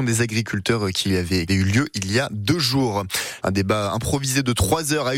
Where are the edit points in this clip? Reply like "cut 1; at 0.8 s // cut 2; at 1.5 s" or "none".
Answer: cut 1; at 1.5 s // cut 2; at 3.4 s